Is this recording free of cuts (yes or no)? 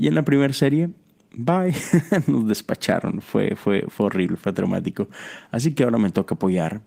yes